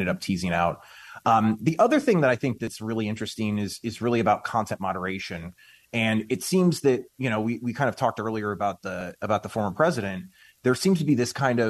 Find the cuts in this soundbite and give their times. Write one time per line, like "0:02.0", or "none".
none